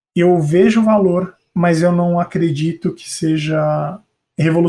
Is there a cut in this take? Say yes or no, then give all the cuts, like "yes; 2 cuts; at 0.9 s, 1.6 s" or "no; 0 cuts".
no; 0 cuts